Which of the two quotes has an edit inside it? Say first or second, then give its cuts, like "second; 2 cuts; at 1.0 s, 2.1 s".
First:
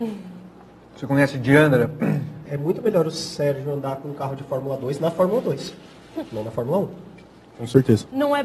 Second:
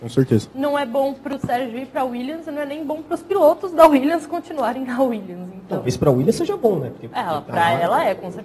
first; 1 cut; at 2.5 s